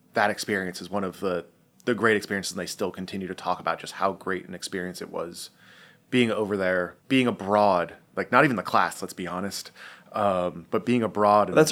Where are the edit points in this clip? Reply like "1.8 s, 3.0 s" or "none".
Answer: 8.9 s